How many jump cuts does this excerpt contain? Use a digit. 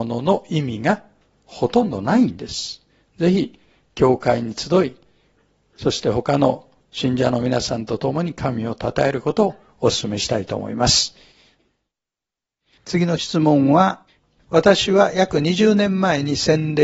0